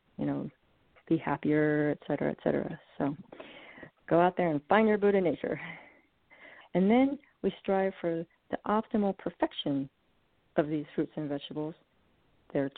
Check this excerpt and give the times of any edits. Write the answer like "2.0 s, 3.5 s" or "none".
6.6 s